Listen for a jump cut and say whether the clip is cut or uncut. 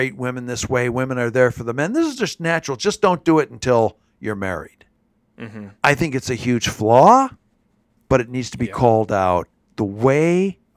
cut